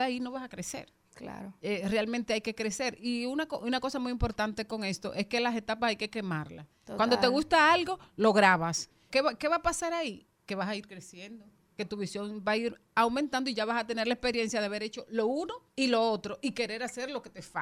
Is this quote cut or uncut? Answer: cut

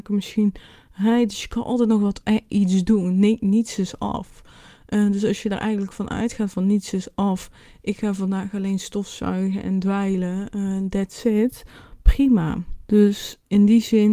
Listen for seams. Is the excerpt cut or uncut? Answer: cut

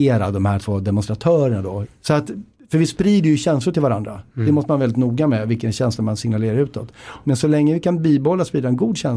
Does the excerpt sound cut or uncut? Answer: cut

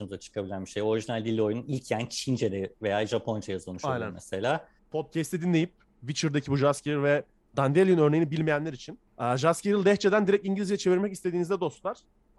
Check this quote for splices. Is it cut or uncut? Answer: cut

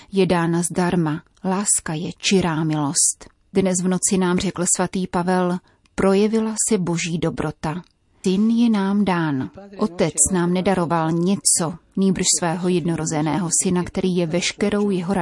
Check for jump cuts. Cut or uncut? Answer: cut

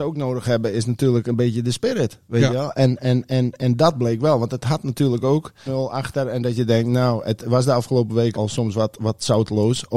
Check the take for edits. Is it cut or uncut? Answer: cut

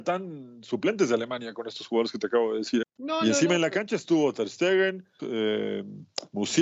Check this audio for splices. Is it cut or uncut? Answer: cut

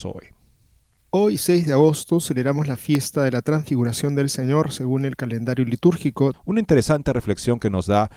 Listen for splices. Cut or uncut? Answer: cut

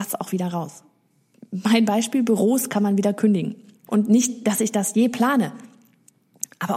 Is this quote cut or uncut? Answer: cut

